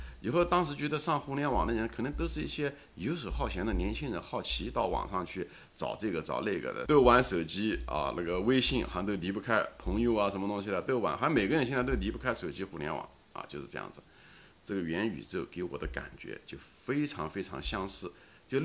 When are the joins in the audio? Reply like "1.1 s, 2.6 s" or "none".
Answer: 6.9 s

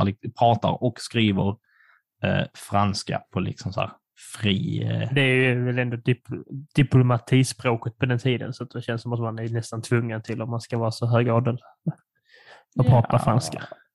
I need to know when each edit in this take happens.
none

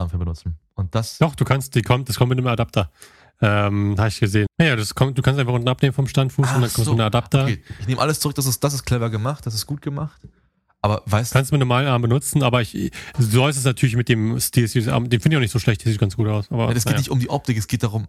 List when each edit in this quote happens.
4.5 s

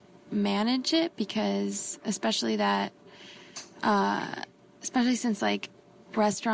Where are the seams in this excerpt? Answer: none

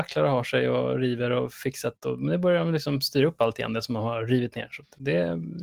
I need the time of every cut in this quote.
none

